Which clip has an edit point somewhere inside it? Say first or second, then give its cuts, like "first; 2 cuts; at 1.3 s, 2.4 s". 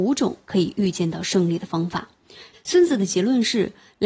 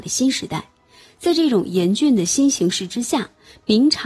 first; 1 cut; at 2.5 s